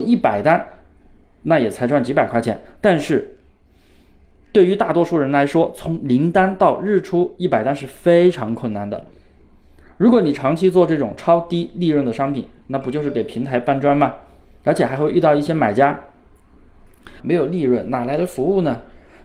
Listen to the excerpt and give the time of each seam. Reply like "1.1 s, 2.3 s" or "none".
17.2 s